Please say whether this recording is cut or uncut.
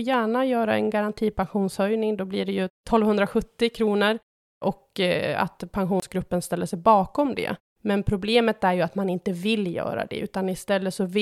uncut